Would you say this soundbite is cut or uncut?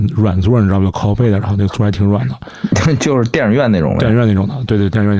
uncut